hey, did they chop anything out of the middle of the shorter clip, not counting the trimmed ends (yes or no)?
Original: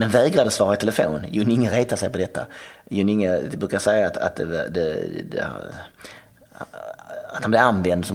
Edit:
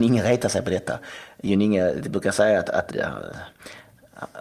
yes